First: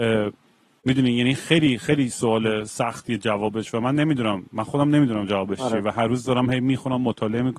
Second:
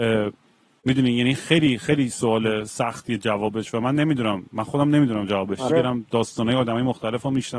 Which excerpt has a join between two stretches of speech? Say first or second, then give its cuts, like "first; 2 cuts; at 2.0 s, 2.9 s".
second; 1 cut; at 5.7 s